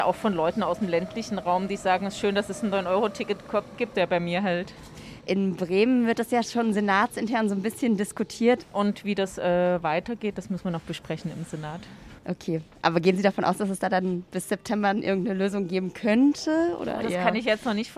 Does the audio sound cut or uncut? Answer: cut